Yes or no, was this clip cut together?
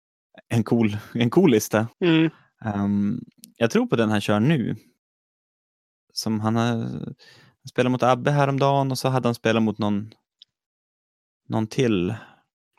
yes